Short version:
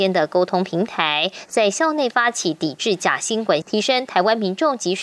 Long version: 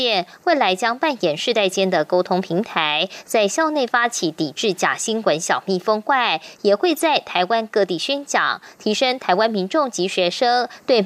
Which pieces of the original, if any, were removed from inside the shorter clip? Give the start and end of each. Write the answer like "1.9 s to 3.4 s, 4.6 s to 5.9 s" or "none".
5.4 s to 8.7 s